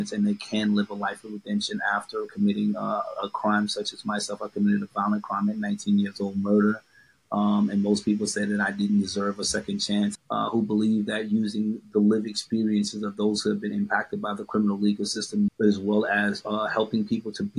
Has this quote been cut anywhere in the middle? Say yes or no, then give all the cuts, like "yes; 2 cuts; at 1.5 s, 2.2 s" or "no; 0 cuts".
yes; 2 cuts; at 10.1 s, 15.5 s